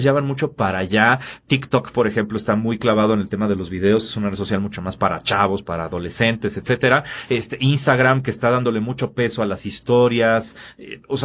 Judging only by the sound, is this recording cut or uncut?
uncut